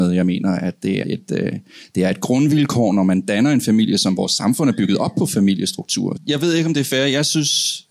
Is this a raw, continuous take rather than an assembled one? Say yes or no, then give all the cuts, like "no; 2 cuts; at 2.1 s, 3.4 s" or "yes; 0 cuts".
no; 2 cuts; at 1.0 s, 6.2 s